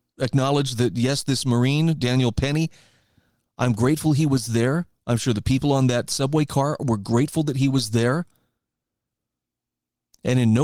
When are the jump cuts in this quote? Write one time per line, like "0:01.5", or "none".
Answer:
none